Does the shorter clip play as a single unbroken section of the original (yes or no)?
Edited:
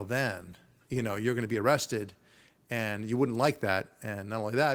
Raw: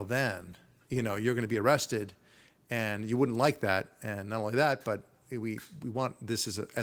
yes